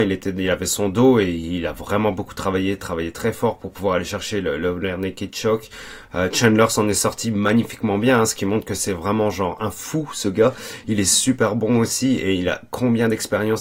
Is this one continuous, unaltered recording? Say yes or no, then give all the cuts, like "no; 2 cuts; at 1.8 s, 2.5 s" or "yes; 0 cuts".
yes; 0 cuts